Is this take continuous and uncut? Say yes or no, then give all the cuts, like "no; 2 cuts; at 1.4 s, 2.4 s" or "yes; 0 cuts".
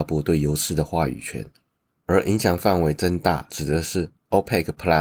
no; 1 cut; at 1.9 s